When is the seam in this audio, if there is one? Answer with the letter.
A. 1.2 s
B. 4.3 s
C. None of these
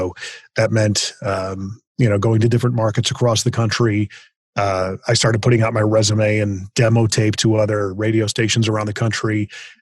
C